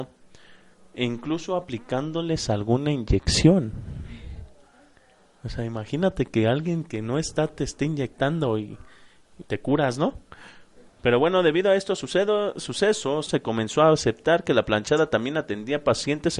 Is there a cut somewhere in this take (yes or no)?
yes